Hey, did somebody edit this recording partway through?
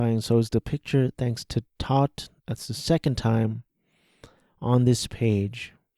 yes; 1 cut; at 2.4 s

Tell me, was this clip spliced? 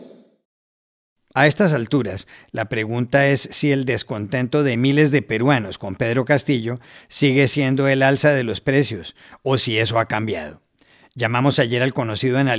no; 0 cuts

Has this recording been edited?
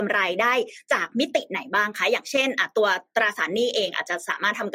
no; 0 cuts

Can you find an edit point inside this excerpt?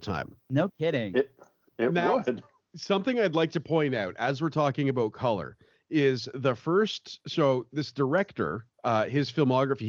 no; 0 cuts

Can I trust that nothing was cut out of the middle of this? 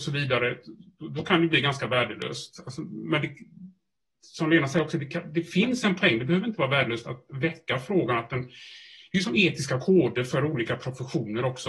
yes; 0 cuts

